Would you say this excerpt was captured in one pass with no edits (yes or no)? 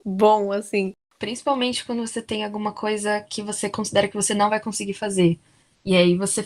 yes